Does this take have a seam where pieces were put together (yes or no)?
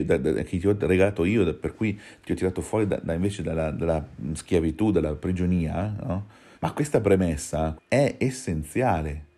yes